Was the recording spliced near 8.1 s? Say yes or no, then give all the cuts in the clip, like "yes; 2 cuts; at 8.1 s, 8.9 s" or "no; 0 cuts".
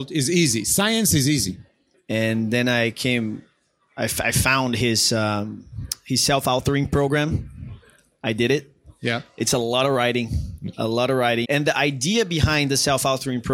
no; 2 cuts; at 1.9 s, 11.4 s